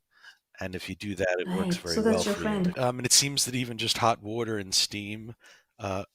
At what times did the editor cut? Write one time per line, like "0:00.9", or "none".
0:02.7